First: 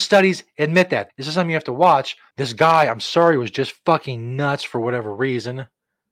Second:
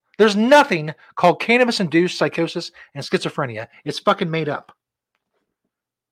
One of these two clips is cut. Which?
first; 2 cuts; at 1.1 s, 2.3 s

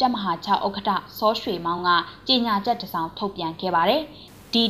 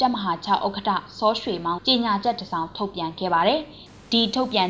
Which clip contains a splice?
second; 1 cut; at 1.8 s

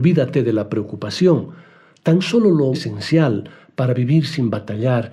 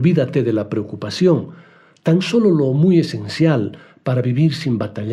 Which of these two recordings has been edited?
first; 1 cut; at 2.7 s

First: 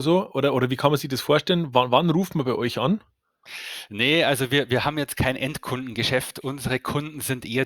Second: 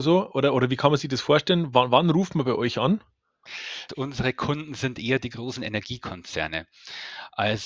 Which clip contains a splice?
second; 1 cut; at 3.9 s

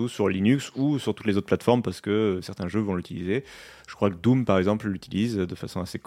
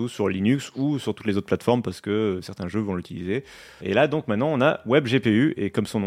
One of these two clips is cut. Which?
second; 1 cut; at 3.8 s

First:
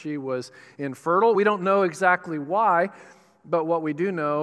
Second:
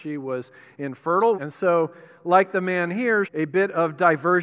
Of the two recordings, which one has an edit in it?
second; 2 cuts; at 1.3 s, 3.2 s

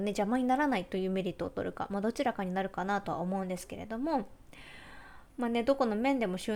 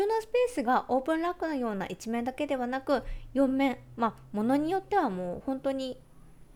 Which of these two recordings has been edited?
first; 1 cut; at 5.3 s

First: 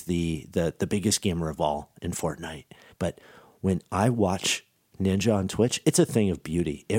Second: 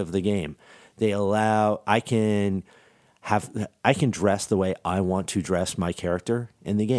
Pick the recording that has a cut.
first; 2 cuts; at 2.9 s, 5.8 s

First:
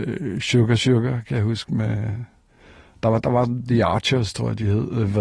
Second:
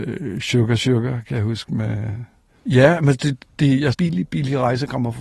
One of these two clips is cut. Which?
second; 2 cuts; at 2.6 s, 3.9 s

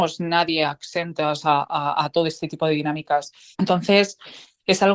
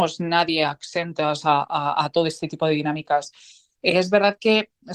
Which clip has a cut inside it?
first; 1 cut; at 3.5 s

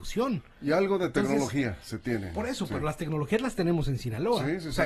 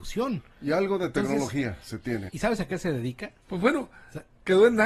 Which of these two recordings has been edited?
second; 2 cuts; at 2.3 s, 3.4 s

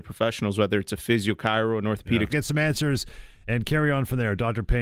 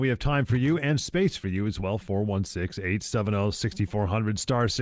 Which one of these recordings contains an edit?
first; 1 cut; at 2.3 s

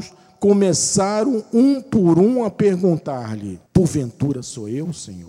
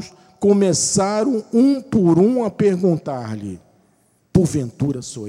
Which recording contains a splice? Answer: first; 1 cut; at 3.7 s

